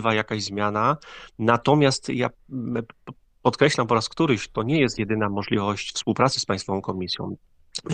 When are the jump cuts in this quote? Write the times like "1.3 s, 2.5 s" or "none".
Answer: none